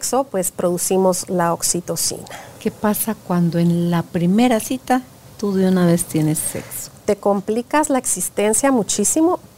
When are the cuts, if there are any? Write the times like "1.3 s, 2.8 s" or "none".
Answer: none